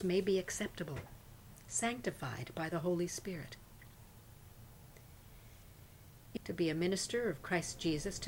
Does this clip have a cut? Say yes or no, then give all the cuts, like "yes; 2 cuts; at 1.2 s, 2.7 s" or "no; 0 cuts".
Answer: yes; 1 cut; at 6.4 s